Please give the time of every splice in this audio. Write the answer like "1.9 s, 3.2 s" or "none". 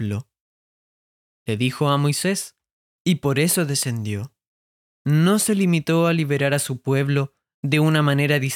2.9 s, 4.9 s

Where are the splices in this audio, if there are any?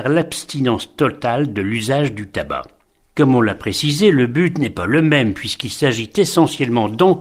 3.0 s

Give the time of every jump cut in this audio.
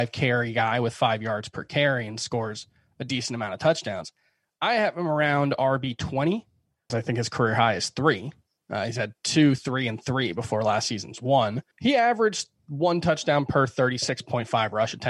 6.9 s, 11.7 s

